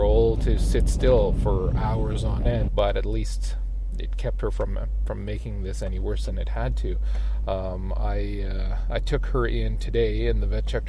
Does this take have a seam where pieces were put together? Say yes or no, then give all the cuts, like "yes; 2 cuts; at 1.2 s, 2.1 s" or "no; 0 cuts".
yes; 1 cut; at 2.7 s